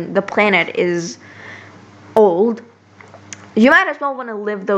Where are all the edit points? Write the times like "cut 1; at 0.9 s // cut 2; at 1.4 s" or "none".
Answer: cut 1; at 3.5 s